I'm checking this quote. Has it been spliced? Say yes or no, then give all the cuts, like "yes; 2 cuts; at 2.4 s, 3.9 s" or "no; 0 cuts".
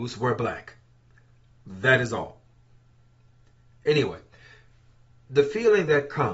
no; 0 cuts